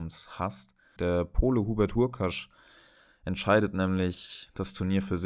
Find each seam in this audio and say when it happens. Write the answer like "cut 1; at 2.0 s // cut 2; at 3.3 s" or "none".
cut 1; at 1.0 s